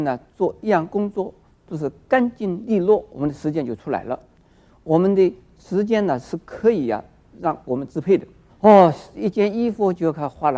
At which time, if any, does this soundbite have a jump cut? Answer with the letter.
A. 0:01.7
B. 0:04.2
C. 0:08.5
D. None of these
C